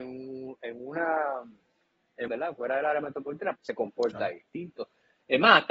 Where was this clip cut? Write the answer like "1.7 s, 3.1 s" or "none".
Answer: 2.3 s, 3.6 s